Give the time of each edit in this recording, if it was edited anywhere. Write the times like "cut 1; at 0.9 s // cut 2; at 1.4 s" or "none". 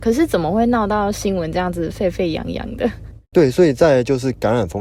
cut 1; at 3.3 s